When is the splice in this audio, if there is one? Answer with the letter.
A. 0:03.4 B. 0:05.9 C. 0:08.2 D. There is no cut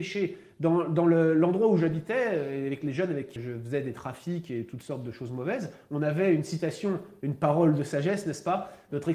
A